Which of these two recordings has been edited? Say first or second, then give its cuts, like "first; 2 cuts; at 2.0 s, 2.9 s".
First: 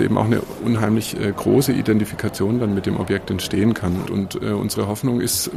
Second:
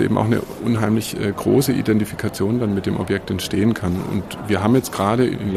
first; 1 cut; at 4.0 s